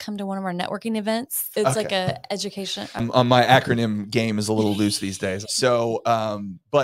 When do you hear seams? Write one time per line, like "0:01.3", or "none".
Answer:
0:01.5
0:03.0
0:05.4